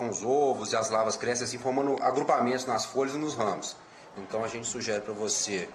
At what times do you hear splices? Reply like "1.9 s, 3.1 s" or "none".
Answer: 4.2 s